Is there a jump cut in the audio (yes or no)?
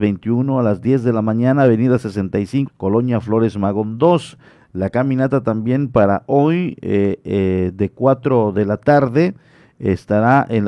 yes